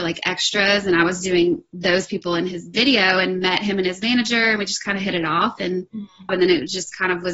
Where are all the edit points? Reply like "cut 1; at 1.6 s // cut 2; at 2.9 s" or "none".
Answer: cut 1; at 6.3 s